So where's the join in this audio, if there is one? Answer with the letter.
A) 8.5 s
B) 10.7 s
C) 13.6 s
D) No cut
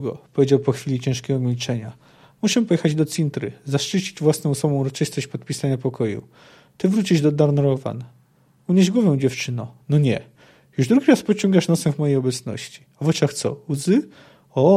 D